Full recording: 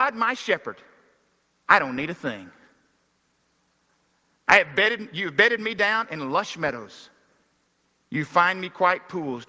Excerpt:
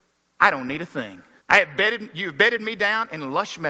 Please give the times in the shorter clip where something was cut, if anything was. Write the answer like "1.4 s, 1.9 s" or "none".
1.4 s